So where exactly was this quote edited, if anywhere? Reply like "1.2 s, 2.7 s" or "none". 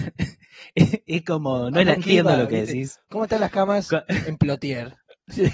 2.0 s